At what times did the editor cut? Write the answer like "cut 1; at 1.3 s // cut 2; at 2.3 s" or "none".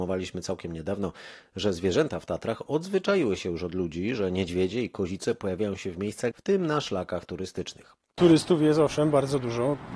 cut 1; at 6.3 s // cut 2; at 8.2 s